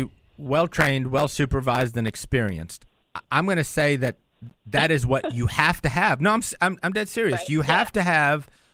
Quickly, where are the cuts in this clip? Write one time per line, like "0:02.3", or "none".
none